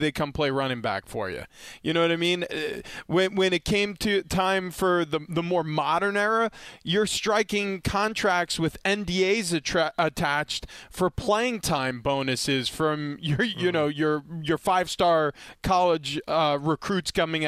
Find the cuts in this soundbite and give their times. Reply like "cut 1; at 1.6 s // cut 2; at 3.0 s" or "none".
none